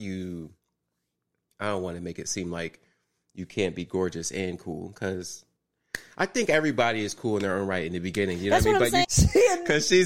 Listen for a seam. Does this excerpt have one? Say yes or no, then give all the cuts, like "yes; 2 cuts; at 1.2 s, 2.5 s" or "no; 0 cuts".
yes; 1 cut; at 9.0 s